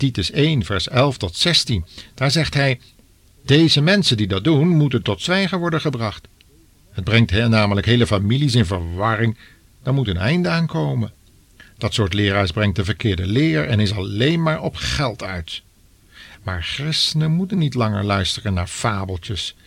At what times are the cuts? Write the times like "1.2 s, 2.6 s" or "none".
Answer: none